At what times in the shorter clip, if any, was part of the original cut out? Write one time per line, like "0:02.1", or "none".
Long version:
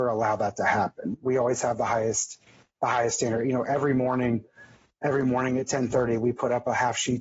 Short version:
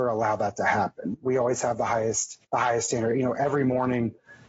0:02.4

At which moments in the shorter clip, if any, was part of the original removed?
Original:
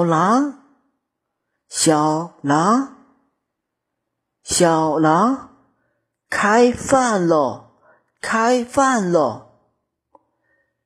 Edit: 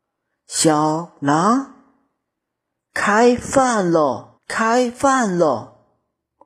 0:02.8
0:04.4

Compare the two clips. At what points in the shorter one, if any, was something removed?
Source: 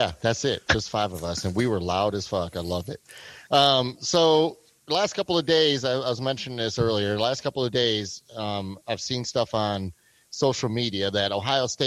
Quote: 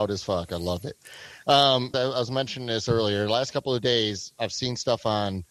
0:01.9
0:04.3

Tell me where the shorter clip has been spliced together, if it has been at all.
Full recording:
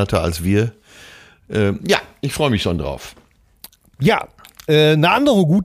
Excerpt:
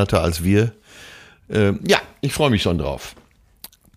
none

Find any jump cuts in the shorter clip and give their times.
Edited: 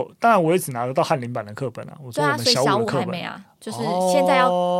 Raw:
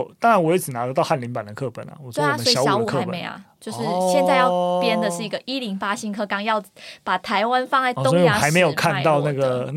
none

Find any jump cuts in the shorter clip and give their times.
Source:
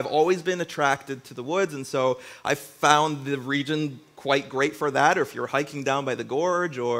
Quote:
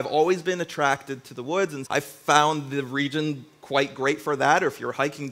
0:01.9

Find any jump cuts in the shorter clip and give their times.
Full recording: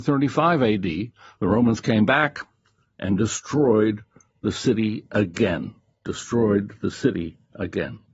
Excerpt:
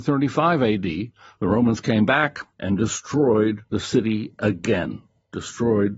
0:02.5
0:03.7

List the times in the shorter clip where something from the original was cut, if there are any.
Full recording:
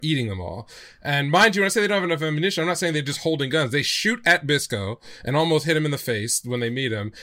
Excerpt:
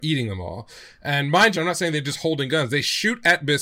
0:01.5

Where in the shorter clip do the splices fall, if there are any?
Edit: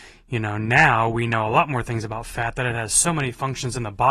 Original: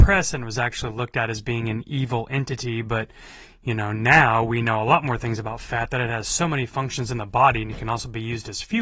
none

